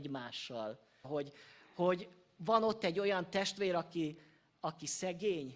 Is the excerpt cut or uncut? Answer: cut